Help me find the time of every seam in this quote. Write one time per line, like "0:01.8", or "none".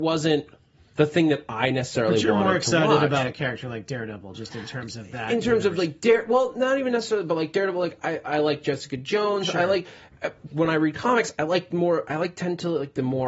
0:10.5